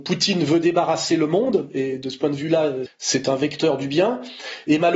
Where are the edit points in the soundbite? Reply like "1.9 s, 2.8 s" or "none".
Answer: 2.9 s